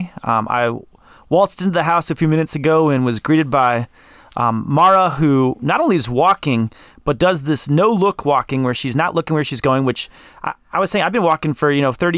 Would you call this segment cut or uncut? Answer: uncut